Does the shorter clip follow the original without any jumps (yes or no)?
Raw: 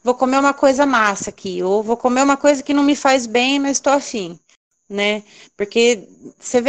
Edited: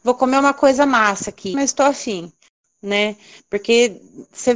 no